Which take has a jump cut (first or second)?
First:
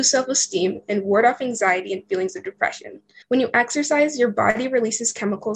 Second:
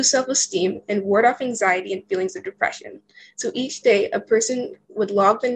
first